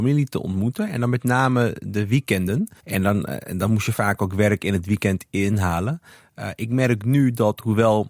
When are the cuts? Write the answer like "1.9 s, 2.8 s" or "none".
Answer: 2.8 s